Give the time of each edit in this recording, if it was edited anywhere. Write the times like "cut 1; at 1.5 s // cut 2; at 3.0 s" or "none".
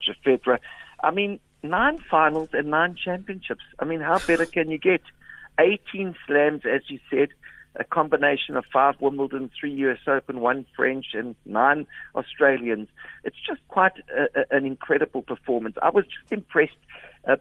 none